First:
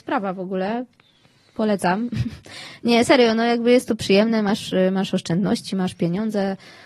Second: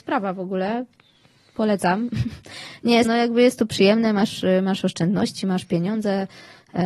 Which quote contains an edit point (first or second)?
second